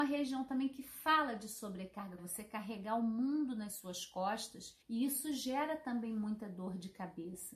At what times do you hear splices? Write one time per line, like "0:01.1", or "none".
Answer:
0:02.2
0:04.8